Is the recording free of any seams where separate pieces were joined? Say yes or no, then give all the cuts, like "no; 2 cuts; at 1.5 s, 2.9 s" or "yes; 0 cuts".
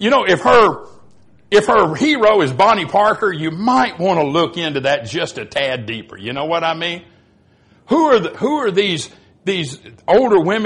yes; 0 cuts